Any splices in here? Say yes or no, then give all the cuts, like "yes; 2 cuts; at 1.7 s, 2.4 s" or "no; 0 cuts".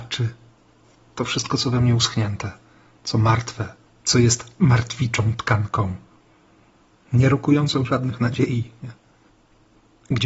yes; 1 cut; at 3.9 s